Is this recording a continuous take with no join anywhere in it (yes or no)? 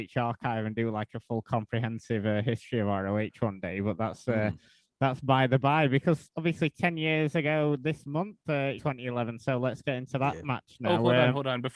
no